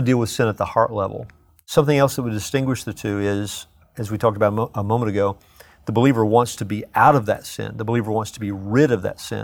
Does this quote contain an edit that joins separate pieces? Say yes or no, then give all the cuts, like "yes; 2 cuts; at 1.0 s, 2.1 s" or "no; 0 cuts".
no; 0 cuts